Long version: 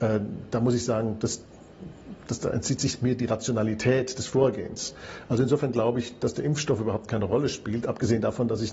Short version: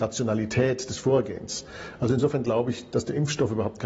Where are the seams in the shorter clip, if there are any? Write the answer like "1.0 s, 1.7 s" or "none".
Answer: none